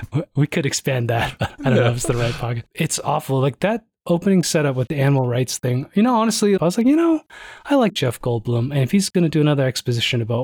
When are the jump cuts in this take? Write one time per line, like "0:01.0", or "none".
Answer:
0:06.6